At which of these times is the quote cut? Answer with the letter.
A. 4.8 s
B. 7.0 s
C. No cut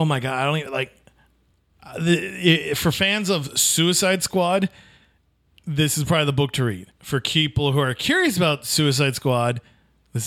B